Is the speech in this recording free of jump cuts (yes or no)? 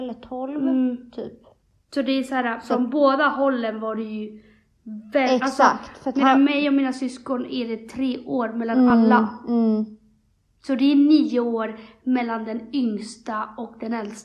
yes